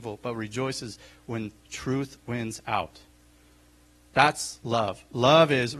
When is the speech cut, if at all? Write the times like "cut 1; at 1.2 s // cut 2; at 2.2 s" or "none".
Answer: none